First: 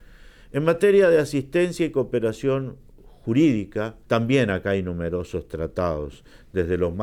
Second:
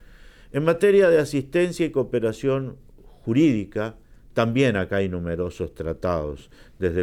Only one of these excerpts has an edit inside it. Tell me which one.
first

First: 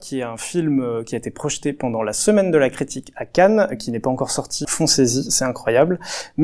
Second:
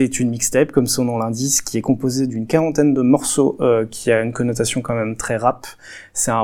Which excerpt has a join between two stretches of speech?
first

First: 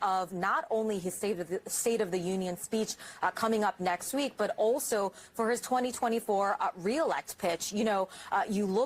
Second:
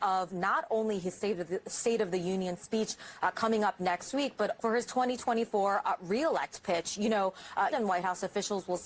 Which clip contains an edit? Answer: second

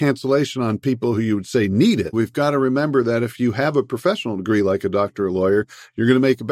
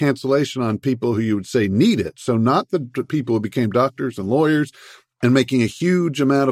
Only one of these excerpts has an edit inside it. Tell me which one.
first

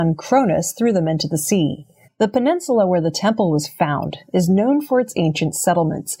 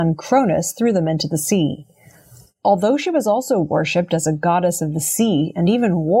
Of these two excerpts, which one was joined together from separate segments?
first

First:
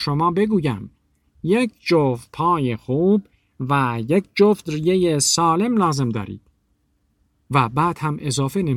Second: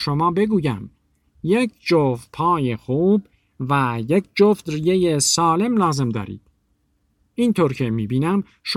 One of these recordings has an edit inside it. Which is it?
second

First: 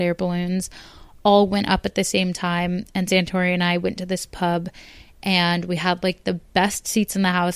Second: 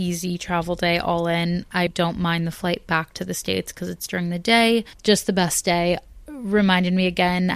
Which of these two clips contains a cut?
second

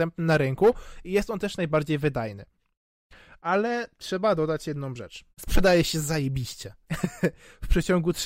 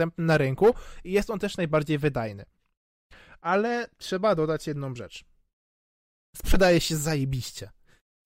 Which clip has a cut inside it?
first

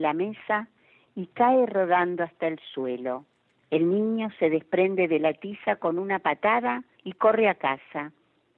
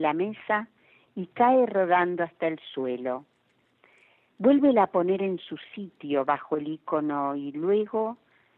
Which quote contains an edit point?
first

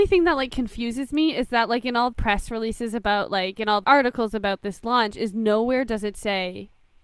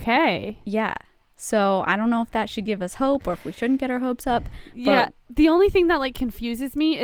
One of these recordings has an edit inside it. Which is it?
first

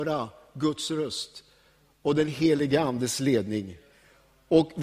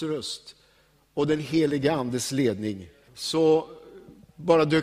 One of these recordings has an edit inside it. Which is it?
second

